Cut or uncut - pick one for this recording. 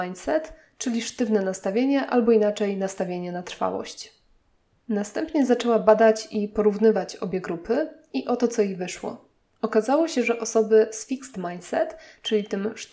uncut